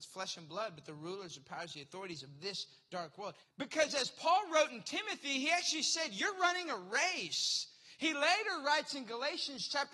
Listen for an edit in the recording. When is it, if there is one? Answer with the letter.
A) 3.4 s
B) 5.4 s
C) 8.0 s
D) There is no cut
A